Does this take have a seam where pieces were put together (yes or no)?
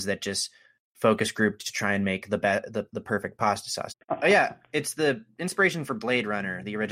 yes